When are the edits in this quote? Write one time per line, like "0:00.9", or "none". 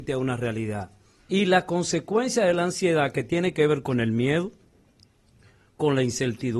0:01.2

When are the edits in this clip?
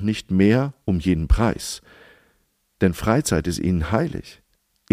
none

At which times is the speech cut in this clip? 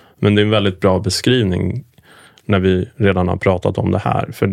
none

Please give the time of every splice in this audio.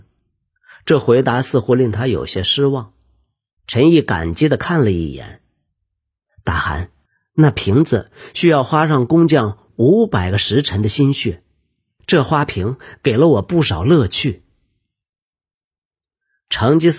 0:03.6

